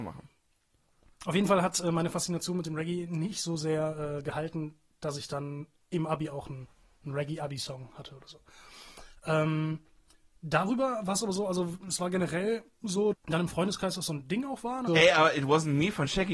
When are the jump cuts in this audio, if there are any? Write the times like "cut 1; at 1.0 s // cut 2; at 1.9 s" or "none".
cut 1; at 13.1 s // cut 2; at 14.9 s

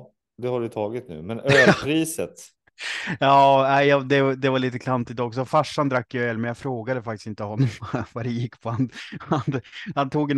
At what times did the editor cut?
none

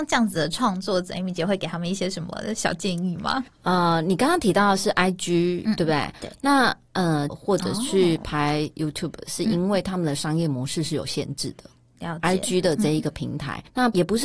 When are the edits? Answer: cut 1; at 7.3 s

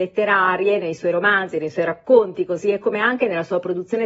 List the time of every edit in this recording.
none

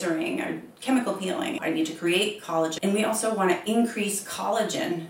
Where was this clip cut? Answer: cut 1; at 1.6 s // cut 2; at 2.8 s

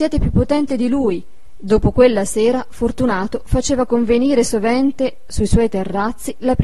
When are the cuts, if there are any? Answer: cut 1; at 1.5 s

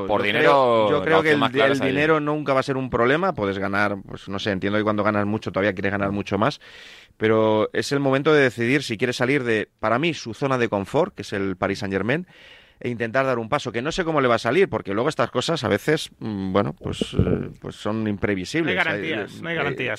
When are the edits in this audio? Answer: none

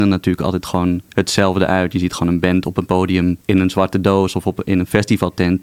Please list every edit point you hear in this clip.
cut 1; at 1.1 s // cut 2; at 3.4 s

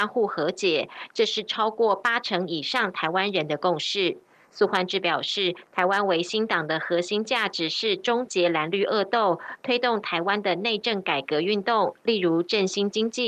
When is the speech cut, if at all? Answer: none

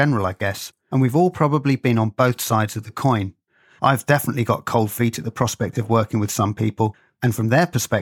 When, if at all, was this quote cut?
none

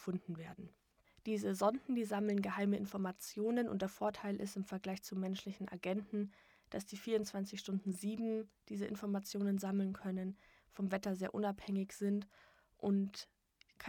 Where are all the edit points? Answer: none

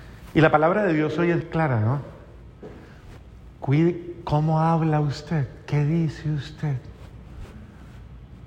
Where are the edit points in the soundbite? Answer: cut 1; at 1.4 s

